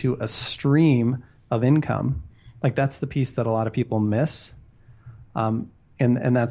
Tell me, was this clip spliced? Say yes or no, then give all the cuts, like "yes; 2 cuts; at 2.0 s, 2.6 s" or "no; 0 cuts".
no; 0 cuts